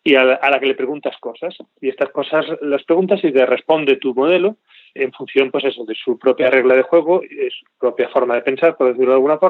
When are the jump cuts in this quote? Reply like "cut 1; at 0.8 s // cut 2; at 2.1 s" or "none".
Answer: none